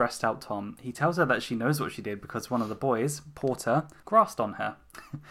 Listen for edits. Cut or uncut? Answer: uncut